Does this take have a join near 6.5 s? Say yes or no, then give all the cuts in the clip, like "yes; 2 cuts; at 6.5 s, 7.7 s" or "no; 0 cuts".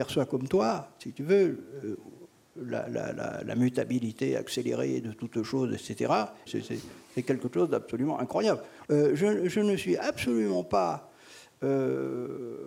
yes; 2 cuts; at 6.5 s, 8.8 s